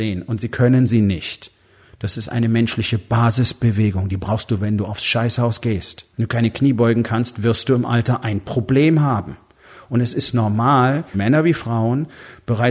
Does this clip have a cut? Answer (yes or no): yes